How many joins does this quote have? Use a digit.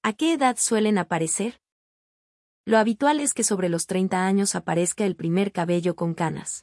1